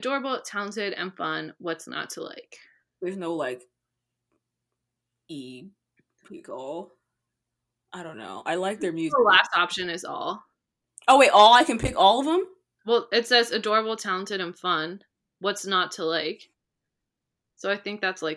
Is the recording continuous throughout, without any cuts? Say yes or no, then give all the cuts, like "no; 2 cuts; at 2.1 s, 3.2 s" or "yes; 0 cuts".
yes; 0 cuts